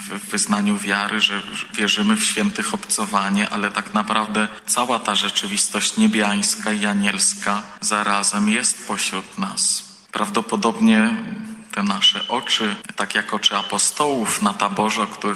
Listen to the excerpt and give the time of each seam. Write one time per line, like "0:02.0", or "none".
none